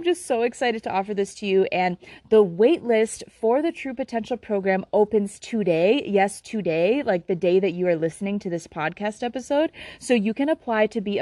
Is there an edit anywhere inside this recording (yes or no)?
no